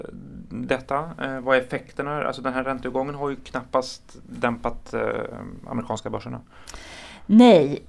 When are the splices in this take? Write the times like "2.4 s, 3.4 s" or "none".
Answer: none

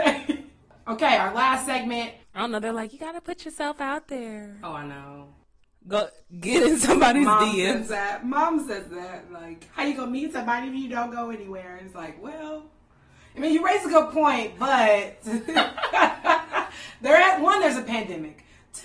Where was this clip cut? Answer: 2.2 s

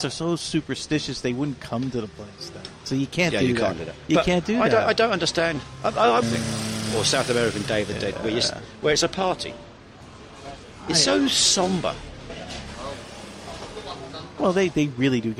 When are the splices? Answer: 6.2 s

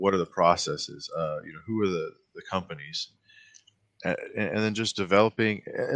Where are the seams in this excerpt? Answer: none

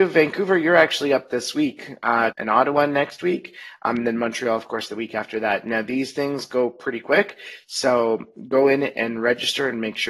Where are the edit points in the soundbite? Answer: 2.3 s

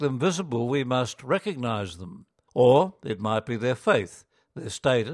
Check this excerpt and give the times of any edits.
2.5 s

